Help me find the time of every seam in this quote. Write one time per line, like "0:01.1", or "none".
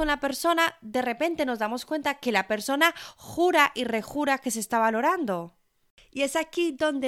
none